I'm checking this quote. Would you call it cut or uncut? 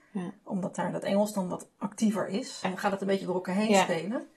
cut